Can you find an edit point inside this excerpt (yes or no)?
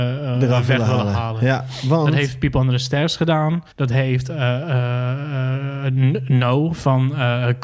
yes